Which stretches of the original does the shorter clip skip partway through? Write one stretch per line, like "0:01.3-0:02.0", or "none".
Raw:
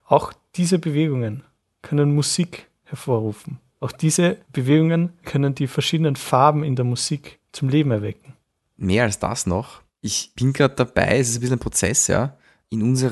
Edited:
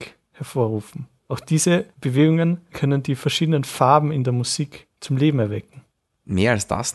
none